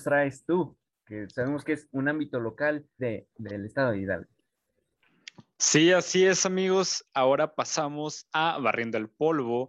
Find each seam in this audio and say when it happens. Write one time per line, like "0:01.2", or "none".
0:03.0